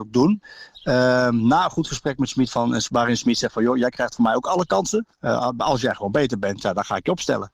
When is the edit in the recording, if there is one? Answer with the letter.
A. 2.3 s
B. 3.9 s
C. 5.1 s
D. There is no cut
C